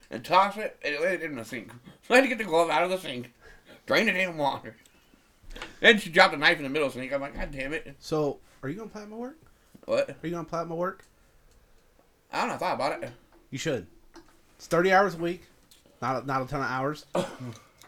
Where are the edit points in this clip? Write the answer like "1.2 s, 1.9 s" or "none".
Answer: none